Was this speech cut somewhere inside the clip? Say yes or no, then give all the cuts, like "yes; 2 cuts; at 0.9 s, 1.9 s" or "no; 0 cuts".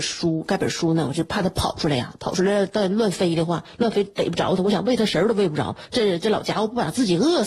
no; 0 cuts